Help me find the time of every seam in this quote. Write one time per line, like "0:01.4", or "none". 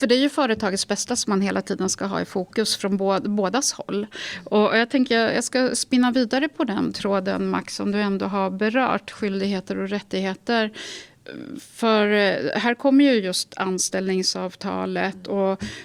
none